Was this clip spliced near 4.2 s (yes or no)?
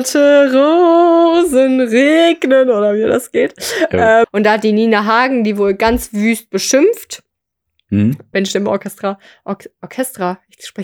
yes